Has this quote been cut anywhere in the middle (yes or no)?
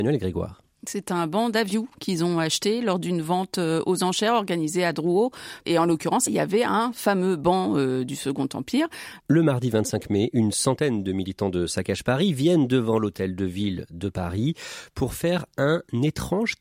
yes